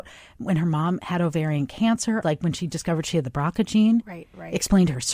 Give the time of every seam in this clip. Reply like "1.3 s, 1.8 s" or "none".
2.2 s